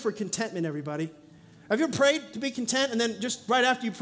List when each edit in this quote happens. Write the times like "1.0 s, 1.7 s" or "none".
none